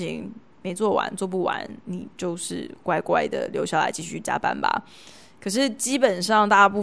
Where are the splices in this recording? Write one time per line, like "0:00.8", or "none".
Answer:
none